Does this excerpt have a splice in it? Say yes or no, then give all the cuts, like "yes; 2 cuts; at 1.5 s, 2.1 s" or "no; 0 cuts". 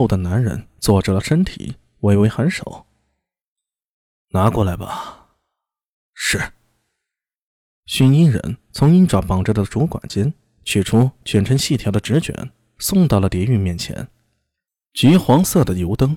no; 0 cuts